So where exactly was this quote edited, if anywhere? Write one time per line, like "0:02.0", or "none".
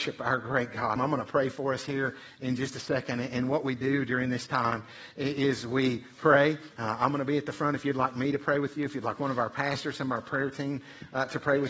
0:01.0

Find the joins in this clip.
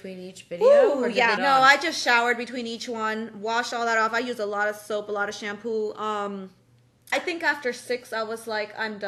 0:01.4
0:07.1

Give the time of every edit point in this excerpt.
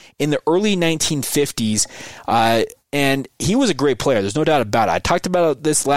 0:02.8

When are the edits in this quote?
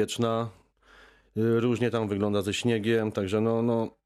none

